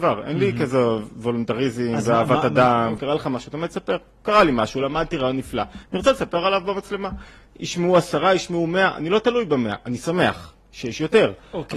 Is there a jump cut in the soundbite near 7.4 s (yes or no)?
no